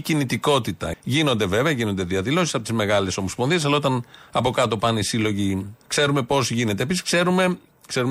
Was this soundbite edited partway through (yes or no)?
yes